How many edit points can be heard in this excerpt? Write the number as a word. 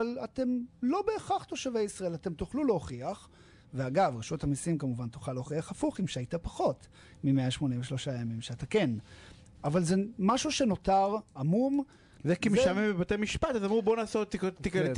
two